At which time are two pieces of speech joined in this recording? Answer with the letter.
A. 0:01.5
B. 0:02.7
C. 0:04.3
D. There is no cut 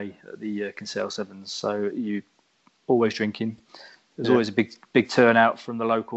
D